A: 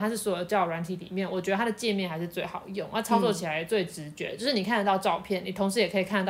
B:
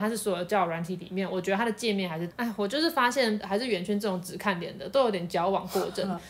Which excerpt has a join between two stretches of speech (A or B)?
B